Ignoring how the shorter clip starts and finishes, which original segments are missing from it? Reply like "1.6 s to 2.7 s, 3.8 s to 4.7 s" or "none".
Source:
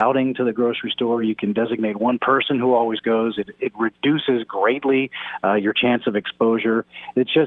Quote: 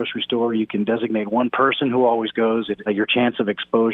3.5 s to 5.5 s